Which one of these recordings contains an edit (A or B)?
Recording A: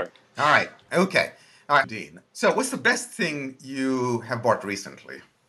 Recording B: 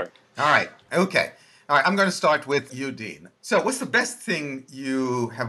A